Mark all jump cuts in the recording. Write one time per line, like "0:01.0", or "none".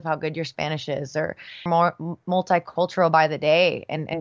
0:01.7